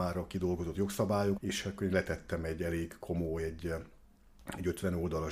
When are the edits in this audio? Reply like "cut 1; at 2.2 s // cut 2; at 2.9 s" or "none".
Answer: cut 1; at 1.4 s